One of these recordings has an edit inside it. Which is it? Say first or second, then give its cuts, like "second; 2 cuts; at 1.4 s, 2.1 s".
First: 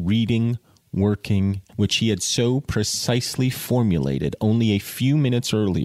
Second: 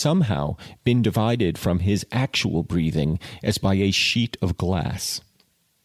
first; 1 cut; at 1.7 s